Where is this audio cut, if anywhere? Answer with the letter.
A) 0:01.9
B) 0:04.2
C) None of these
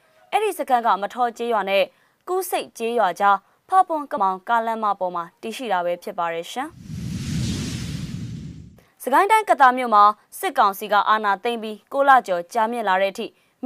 B